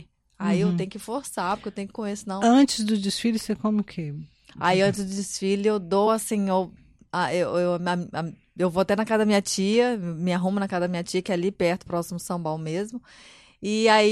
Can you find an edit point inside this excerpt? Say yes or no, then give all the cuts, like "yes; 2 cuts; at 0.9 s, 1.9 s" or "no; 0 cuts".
no; 0 cuts